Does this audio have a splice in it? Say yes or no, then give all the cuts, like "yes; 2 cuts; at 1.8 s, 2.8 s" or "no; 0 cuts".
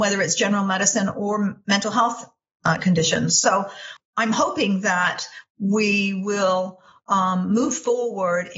no; 0 cuts